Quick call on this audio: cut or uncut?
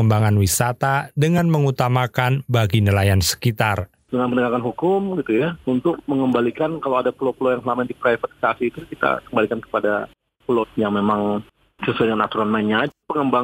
cut